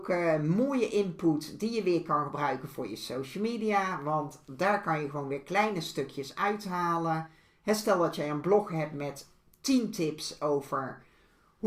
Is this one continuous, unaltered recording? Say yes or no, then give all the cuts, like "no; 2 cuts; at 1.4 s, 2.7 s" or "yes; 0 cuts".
yes; 0 cuts